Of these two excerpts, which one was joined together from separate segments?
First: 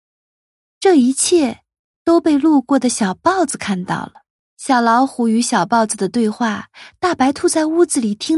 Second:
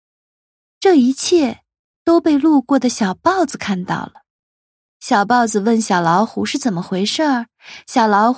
first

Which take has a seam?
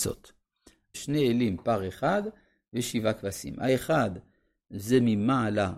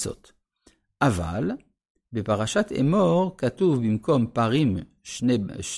first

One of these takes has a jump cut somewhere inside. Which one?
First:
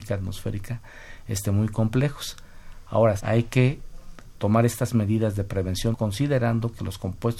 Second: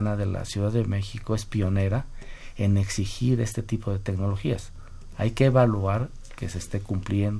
first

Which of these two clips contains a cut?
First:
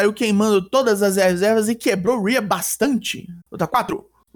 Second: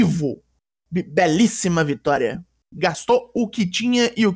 first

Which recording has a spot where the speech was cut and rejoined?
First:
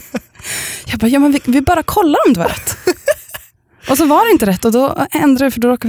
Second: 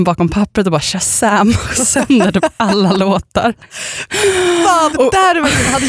second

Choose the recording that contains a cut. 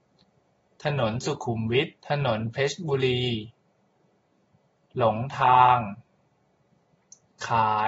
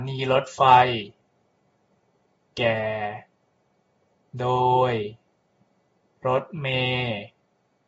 first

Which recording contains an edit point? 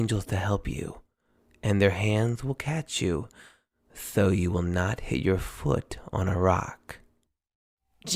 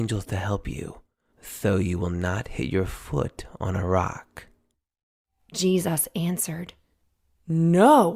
second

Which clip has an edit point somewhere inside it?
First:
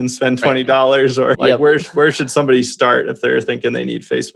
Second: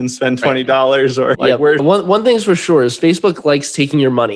second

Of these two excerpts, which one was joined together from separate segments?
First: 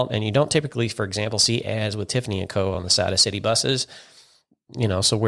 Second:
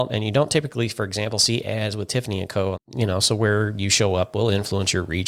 second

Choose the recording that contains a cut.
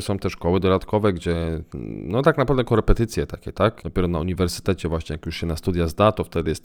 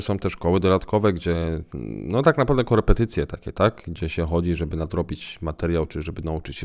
first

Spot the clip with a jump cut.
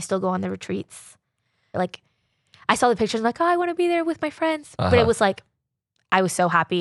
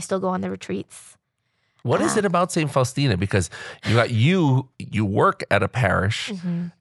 first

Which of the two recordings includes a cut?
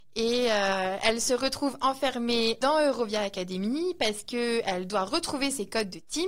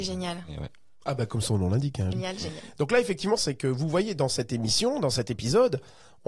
second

